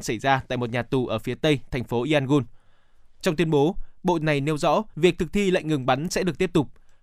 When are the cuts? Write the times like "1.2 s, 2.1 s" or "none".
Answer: 3.2 s, 4.9 s